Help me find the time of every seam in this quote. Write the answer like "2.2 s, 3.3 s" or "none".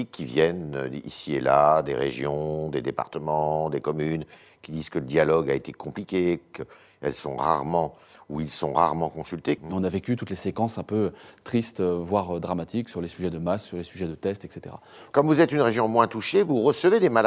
9.6 s, 15.1 s